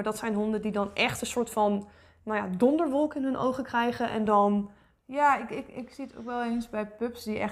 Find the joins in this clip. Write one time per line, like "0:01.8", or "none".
none